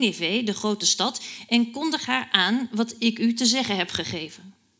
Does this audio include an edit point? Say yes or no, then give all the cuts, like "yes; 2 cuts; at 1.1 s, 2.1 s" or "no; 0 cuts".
no; 0 cuts